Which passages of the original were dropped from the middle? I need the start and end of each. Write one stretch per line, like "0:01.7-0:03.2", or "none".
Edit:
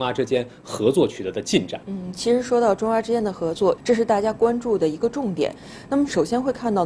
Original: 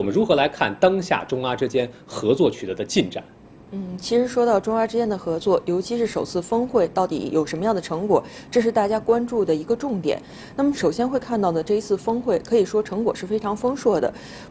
0:03.3-0:03.7
0:05.6-0:08.4